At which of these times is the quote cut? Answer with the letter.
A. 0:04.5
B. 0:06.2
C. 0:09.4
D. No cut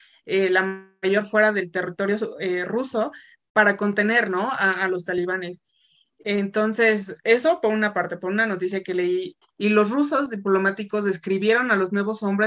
C